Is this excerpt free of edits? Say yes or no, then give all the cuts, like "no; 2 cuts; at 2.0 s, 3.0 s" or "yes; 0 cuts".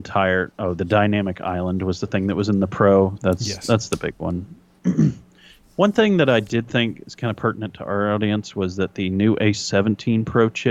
no; 2 cuts; at 3.2 s, 4.8 s